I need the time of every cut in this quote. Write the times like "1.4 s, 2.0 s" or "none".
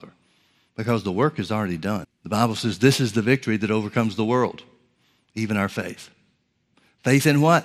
2.0 s